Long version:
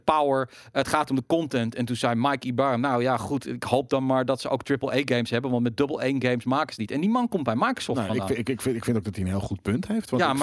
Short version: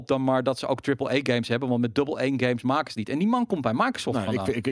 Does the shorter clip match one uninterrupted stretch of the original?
yes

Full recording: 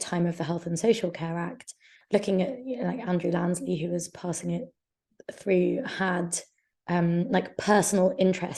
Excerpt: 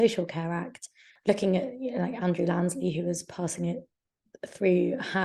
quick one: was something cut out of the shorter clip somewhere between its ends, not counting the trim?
no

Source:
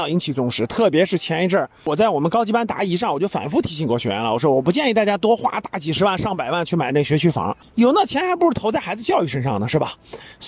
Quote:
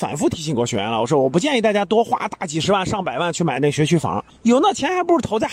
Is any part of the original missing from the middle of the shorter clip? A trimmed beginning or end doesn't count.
no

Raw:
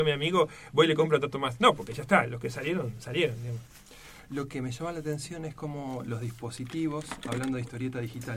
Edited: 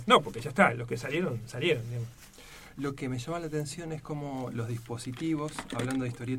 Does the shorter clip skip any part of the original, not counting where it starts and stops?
no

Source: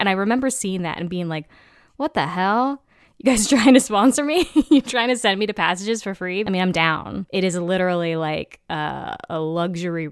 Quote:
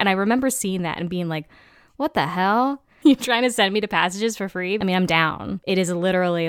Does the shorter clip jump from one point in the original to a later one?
yes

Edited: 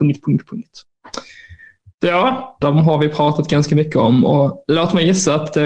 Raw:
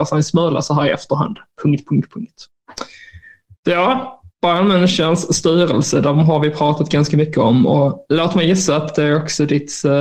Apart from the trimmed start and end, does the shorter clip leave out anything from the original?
yes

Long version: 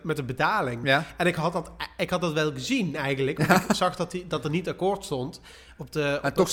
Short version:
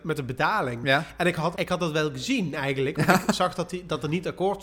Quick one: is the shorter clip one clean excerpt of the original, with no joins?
no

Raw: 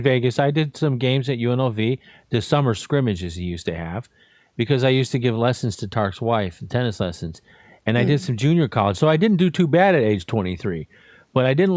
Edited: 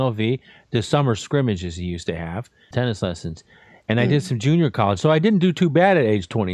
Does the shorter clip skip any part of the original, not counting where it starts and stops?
yes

